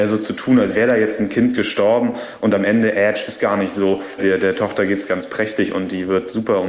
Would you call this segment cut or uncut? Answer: cut